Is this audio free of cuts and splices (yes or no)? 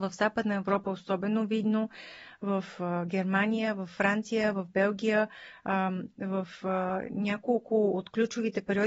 yes